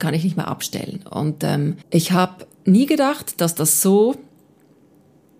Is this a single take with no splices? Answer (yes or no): no